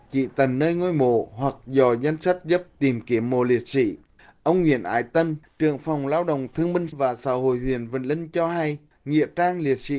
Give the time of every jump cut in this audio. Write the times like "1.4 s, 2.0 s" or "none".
none